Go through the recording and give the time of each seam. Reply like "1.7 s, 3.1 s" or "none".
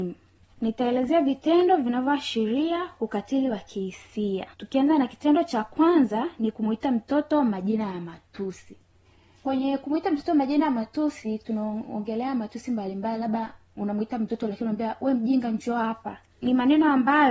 4.5 s